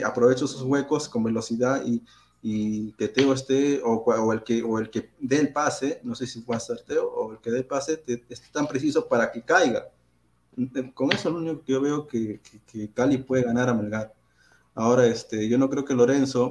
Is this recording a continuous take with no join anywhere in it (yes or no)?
yes